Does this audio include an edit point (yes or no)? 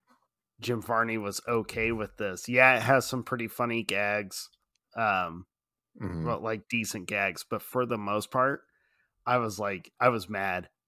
no